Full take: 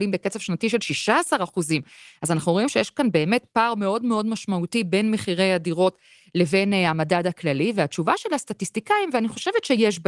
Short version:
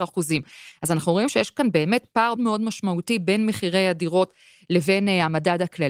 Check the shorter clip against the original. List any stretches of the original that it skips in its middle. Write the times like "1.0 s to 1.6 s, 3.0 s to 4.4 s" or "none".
3.7 s to 4.0 s